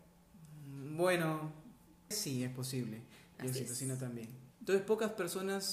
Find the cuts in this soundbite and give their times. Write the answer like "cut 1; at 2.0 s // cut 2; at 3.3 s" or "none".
cut 1; at 2.1 s // cut 2; at 3.3 s // cut 3; at 4.5 s